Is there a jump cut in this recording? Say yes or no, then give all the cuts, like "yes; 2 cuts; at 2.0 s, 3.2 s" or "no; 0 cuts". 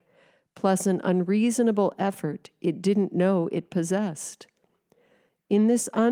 no; 0 cuts